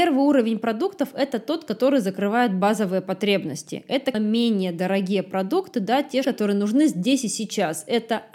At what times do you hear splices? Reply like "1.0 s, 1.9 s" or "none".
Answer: 4.1 s, 6.2 s